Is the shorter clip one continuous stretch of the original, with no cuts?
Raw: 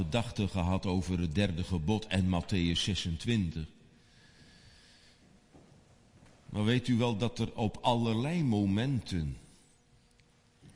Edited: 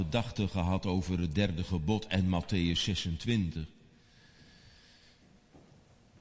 yes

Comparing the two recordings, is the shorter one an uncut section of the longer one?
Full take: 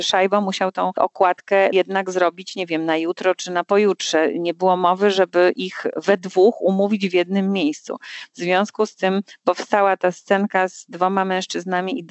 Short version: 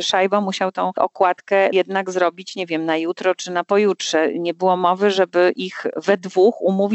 yes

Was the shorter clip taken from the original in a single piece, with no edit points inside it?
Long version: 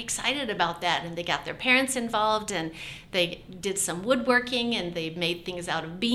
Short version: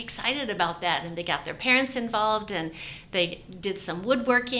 yes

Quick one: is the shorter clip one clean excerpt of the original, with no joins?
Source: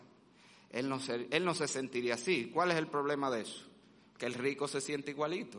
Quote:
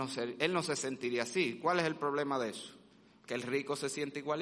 yes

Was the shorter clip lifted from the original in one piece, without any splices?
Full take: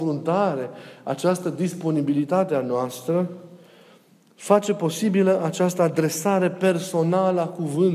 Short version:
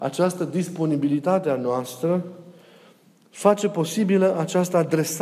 yes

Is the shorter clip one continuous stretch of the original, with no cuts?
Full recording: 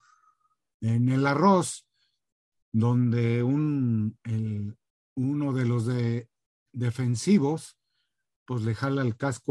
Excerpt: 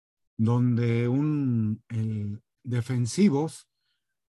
no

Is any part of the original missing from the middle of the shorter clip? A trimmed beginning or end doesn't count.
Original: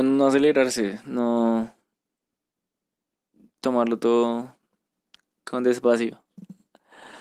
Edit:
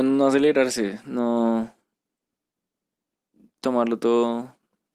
no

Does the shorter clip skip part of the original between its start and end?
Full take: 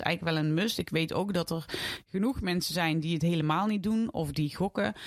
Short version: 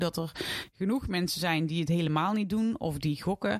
no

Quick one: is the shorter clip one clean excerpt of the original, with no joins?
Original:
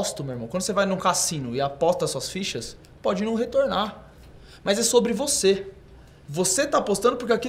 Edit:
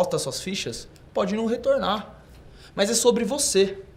yes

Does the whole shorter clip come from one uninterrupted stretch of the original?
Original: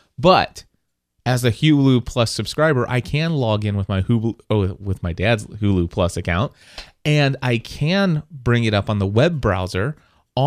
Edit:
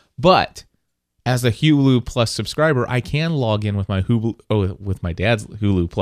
yes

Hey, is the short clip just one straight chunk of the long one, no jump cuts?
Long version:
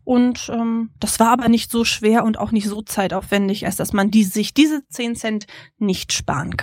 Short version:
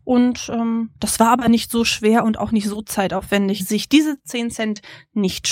no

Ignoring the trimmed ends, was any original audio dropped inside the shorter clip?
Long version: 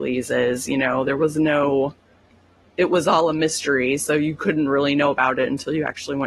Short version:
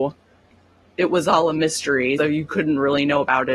yes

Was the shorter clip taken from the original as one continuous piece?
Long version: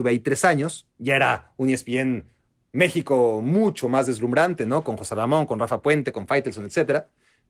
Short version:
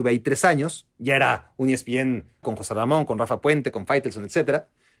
no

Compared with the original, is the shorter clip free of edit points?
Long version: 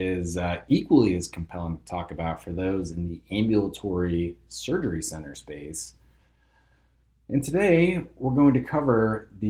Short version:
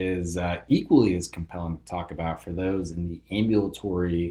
yes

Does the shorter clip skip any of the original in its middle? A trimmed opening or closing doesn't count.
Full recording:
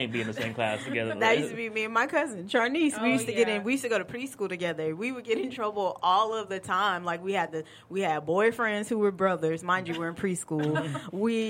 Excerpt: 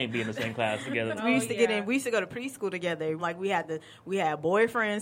yes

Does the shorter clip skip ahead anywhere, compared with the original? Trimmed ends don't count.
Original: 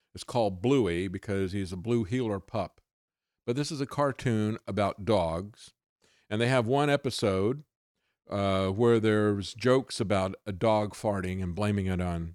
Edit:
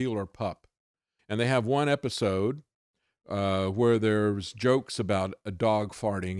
yes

